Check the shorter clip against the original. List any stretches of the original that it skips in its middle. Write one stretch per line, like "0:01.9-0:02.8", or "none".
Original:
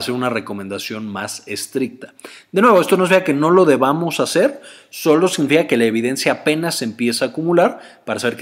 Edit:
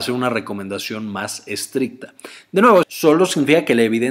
0:02.8-0:04.9